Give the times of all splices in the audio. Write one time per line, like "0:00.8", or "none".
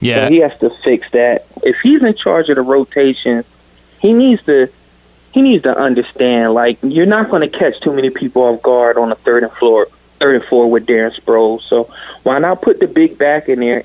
0:01.6